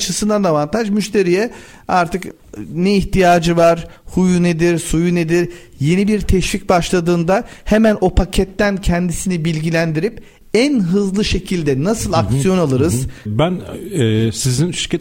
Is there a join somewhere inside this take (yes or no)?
yes